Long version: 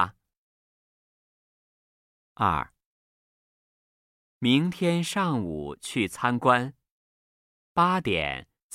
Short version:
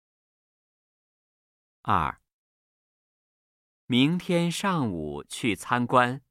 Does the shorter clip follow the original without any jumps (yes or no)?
yes